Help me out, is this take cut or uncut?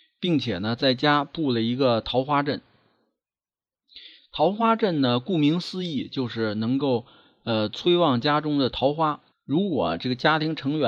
cut